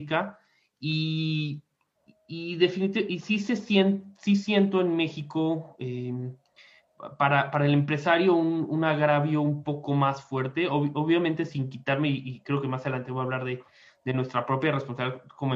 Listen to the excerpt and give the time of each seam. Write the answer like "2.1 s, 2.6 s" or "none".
none